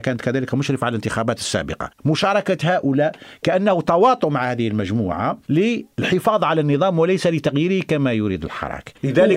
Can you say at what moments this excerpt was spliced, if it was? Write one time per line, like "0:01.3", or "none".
0:01.9